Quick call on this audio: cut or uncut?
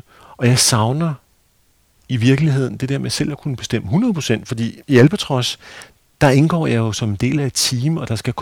cut